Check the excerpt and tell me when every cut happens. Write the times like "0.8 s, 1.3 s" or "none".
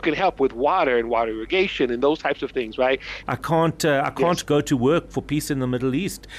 3.2 s